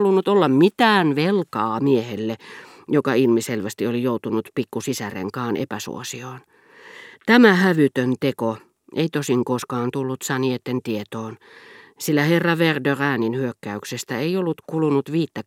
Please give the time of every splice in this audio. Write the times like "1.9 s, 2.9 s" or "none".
none